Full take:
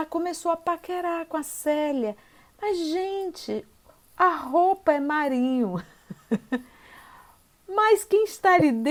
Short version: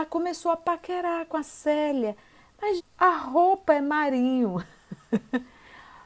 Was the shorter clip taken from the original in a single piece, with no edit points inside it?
no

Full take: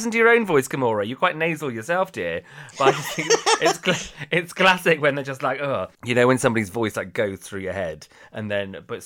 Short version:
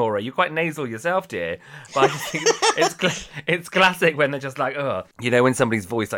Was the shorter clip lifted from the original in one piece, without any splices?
yes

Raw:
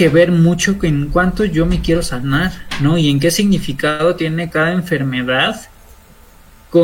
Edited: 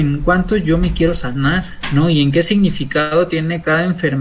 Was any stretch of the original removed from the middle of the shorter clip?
no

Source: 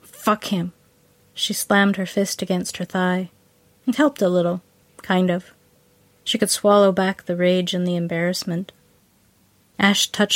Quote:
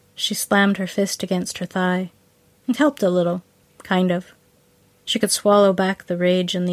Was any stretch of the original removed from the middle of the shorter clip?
no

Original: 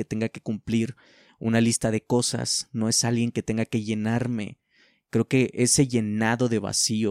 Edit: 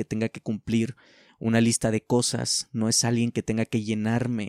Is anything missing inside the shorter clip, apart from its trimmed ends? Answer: no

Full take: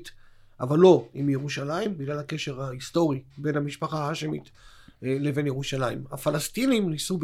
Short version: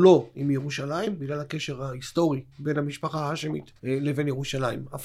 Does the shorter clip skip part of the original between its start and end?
yes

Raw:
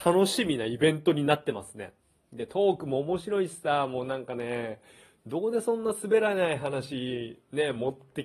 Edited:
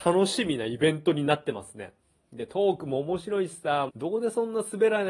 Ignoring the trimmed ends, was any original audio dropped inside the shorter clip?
yes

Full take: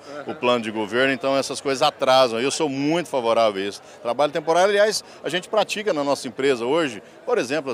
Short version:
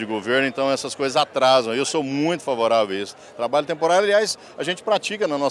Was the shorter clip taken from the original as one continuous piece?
yes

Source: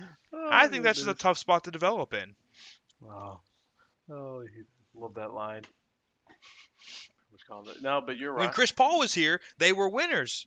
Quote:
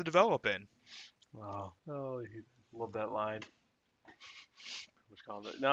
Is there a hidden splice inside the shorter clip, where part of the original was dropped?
yes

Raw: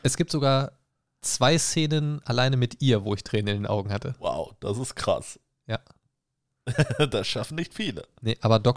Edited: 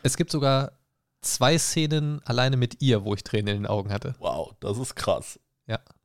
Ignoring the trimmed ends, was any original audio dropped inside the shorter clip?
no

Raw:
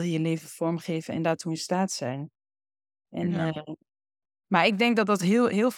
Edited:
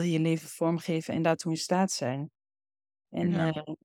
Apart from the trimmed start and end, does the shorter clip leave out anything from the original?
no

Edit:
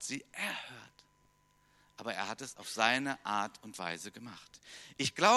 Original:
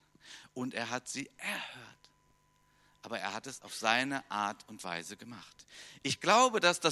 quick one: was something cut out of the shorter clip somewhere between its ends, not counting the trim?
no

